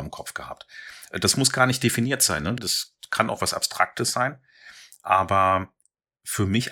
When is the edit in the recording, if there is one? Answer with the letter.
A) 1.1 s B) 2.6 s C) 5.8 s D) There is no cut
B